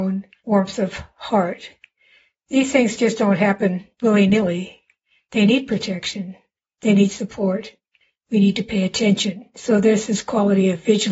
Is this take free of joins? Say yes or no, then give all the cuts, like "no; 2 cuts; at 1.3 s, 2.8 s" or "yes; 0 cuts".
yes; 0 cuts